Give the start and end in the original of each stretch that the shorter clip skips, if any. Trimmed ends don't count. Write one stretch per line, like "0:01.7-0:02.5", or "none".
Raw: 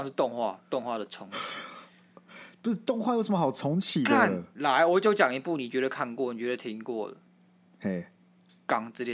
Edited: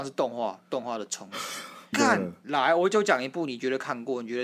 0:01.9-0:04.0